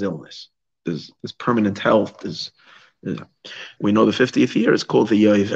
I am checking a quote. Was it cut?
yes; 1 cut; at 3.8 s

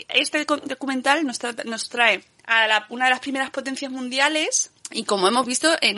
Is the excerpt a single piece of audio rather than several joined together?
no; 1 cut; at 4.8 s

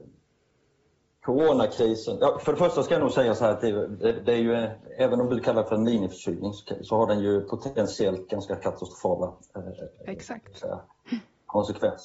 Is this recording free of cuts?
yes; 0 cuts

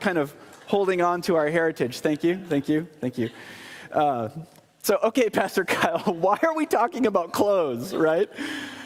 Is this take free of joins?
yes; 0 cuts

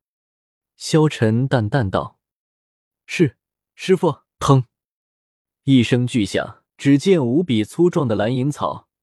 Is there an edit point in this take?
yes; 2 cuts; at 4.3 s, 6.7 s

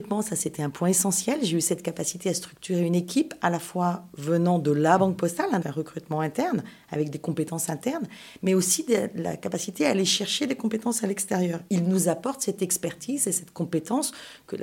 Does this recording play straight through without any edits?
no; 2 cuts; at 5.6 s, 11.7 s

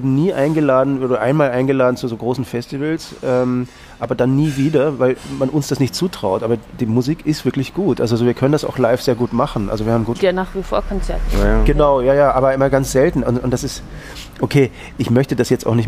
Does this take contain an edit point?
yes; 1 cut; at 10.2 s

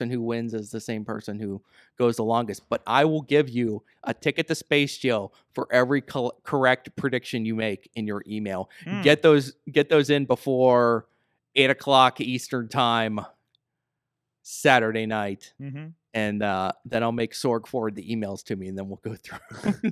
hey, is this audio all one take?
yes; 0 cuts

